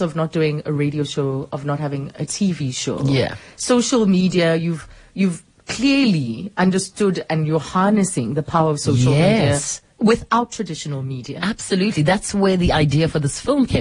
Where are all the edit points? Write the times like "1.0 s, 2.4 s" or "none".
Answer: none